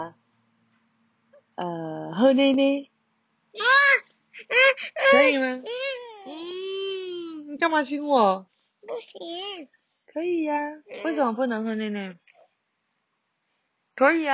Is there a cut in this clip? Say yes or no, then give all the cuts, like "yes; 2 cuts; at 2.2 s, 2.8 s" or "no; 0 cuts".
no; 0 cuts